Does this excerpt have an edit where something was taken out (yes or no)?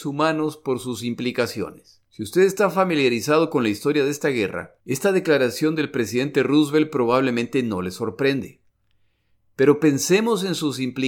yes